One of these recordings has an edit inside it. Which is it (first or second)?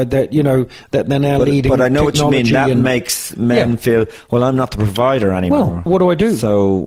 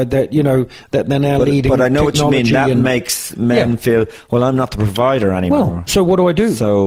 first